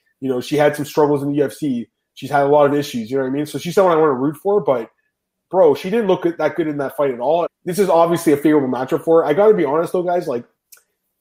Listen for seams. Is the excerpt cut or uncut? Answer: cut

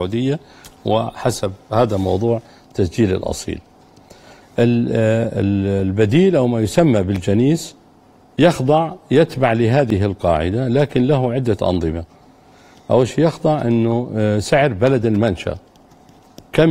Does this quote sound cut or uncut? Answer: uncut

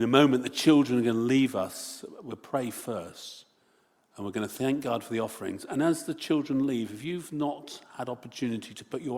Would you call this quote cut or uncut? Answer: uncut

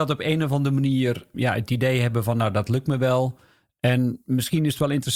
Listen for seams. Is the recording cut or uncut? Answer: cut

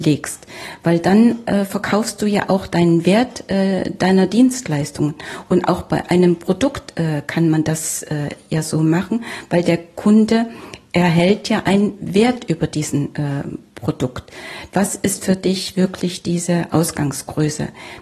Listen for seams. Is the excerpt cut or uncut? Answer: cut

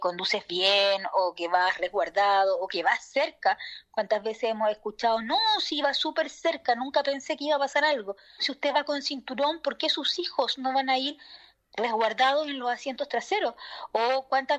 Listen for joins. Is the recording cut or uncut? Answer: cut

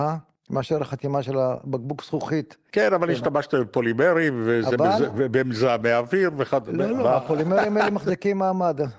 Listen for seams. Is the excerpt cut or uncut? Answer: cut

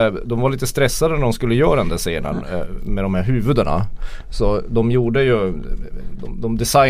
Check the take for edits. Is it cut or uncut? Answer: uncut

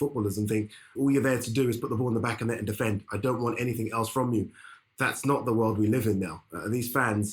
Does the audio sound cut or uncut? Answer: cut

